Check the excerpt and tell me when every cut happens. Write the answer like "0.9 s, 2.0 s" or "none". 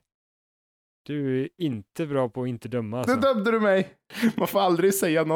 none